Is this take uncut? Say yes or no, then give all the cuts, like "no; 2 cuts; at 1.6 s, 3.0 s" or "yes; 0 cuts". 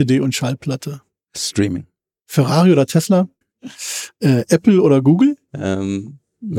no; 2 cuts; at 3.4 s, 5.5 s